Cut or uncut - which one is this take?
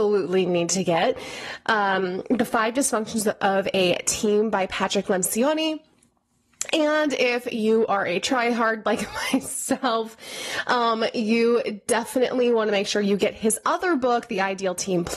uncut